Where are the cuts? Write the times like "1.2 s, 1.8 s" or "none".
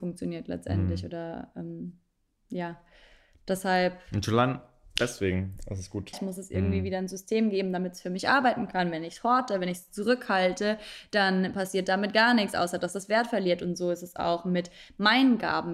6.1 s